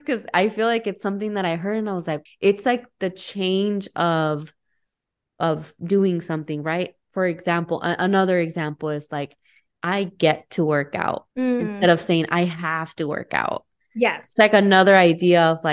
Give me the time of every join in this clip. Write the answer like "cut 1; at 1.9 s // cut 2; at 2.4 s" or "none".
cut 1; at 2.3 s // cut 2; at 11.3 s